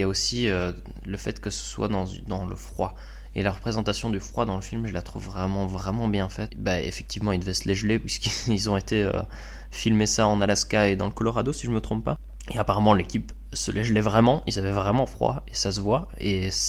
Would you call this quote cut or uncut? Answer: cut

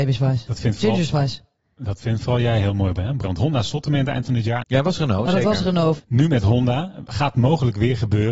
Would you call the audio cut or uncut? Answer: cut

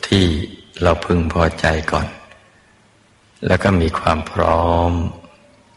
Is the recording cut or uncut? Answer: uncut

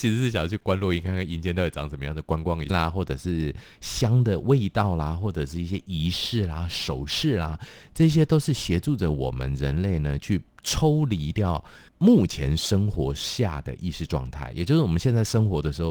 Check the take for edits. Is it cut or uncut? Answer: cut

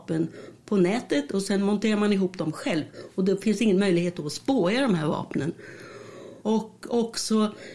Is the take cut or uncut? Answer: cut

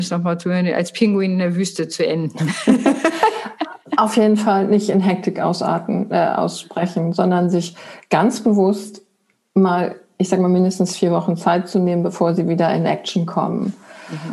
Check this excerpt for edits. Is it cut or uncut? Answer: uncut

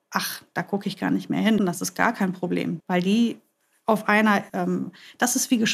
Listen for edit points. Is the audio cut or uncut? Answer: cut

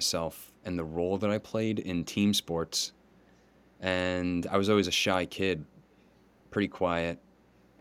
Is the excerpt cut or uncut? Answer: uncut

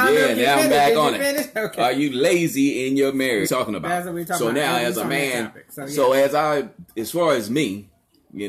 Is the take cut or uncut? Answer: cut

